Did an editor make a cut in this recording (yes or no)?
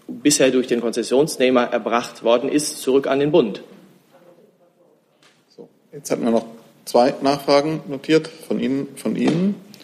no